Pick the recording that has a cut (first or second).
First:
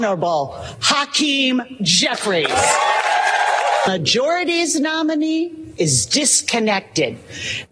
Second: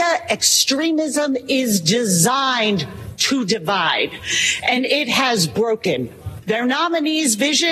second